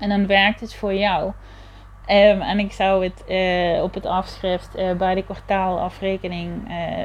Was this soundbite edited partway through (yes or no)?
yes